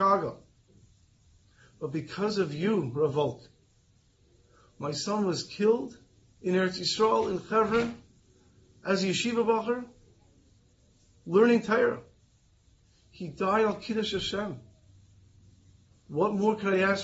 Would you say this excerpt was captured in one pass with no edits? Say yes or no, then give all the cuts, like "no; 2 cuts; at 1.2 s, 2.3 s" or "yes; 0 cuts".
yes; 0 cuts